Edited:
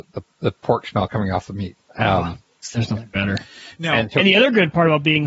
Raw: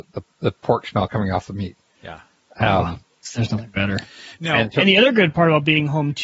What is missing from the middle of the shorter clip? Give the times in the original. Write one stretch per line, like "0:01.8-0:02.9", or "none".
0:01.8-0:02.4